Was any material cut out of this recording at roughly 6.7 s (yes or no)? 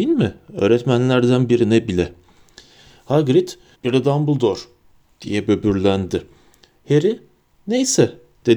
no